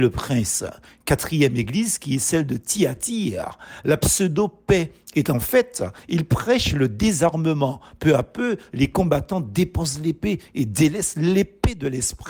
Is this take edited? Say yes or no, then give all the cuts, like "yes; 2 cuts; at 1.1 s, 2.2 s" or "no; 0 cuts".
no; 0 cuts